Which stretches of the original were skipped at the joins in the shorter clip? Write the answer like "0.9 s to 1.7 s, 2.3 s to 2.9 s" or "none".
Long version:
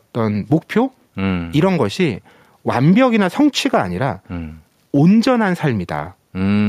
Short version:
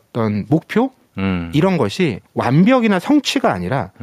2.3 s to 2.6 s